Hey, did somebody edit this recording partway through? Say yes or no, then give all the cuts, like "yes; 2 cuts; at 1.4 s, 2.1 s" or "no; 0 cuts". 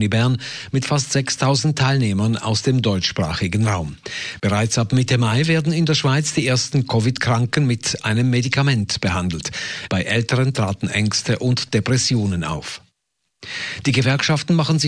yes; 2 cuts; at 4.4 s, 9.9 s